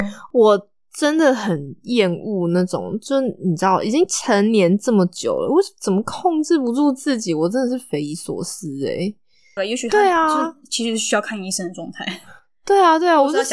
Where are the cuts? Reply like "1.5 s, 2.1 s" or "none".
9.6 s